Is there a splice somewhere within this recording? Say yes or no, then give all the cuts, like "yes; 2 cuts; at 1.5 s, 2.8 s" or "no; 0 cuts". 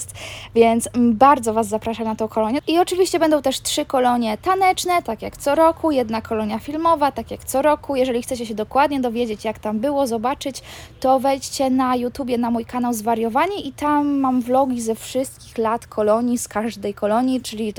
no; 0 cuts